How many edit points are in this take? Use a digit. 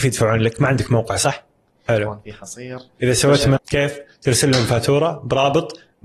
2